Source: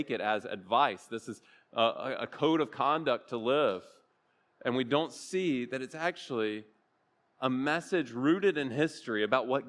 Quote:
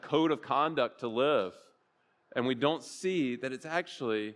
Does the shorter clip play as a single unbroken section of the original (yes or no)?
yes